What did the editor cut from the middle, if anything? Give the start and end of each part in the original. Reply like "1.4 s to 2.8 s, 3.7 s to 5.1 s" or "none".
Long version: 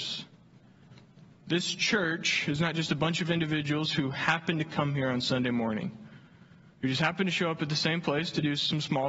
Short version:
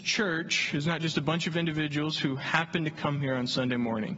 none